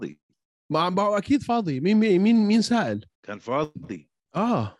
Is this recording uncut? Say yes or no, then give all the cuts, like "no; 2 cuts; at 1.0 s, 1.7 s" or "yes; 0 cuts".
no; 1 cut; at 3.1 s